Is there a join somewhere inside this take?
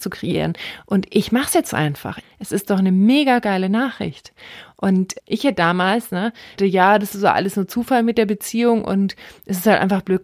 yes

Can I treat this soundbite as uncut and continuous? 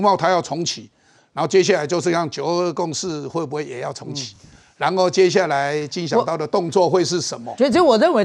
yes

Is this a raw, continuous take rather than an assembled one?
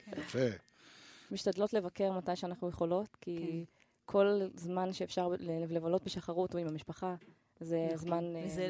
no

